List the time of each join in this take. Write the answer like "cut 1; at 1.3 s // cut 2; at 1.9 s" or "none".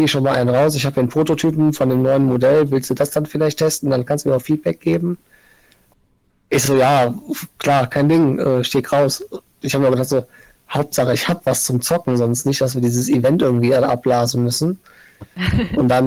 none